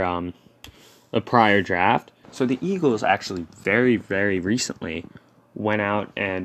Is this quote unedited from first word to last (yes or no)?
no